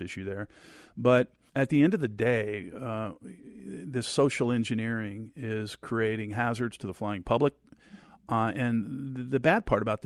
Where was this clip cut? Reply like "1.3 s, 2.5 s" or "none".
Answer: none

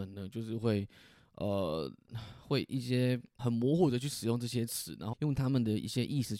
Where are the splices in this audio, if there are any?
3.4 s, 5.1 s

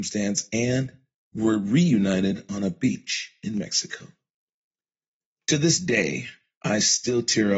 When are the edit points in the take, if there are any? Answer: 1.2 s

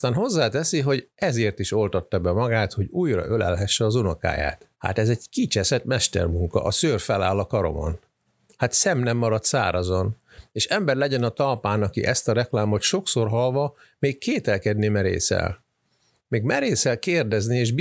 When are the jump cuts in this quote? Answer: 4.7 s

